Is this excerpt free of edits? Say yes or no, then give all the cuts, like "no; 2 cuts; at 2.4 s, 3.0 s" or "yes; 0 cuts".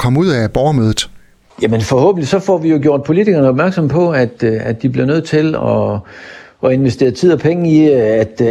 yes; 0 cuts